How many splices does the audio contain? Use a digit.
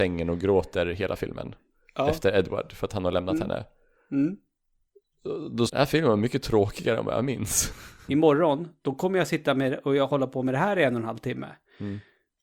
2